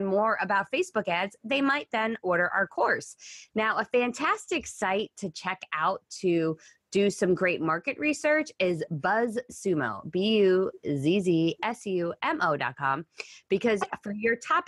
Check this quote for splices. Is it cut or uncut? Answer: cut